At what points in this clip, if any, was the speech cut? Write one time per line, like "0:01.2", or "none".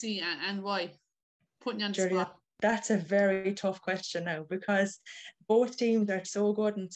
none